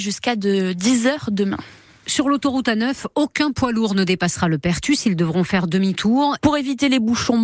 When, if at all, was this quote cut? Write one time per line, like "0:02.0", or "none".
0:06.4